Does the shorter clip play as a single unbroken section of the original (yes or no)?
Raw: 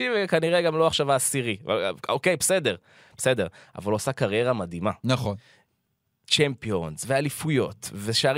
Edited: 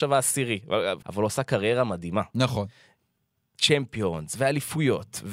no